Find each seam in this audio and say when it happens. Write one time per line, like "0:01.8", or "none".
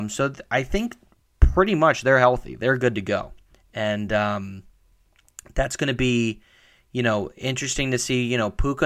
none